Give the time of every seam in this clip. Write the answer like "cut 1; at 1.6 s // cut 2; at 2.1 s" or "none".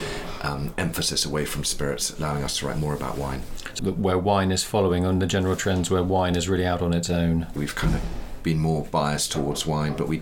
cut 1; at 3.8 s // cut 2; at 7.6 s

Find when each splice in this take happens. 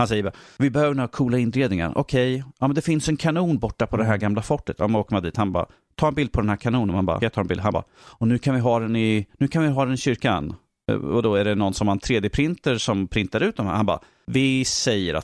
cut 1; at 7.2 s

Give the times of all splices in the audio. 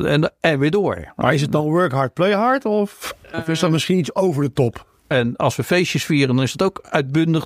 cut 1; at 3.3 s // cut 2; at 5.1 s

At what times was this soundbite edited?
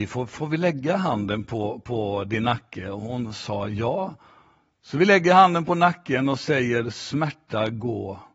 none

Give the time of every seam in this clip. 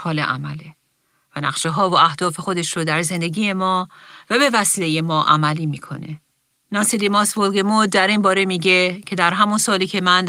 cut 1; at 6.5 s

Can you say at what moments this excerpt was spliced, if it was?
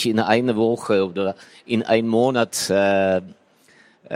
none

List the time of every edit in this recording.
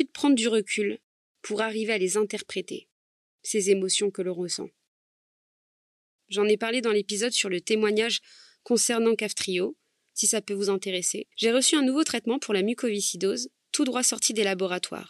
cut 1; at 6.2 s // cut 2; at 11.3 s

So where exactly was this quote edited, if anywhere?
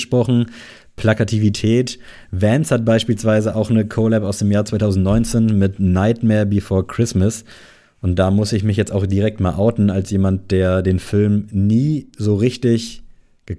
none

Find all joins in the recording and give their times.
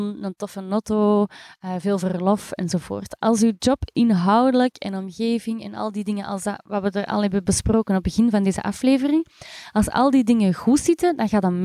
none

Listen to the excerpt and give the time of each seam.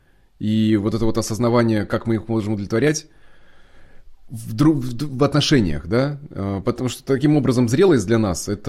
none

